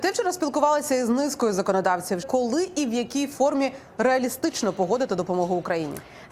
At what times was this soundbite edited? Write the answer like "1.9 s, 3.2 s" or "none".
2.2 s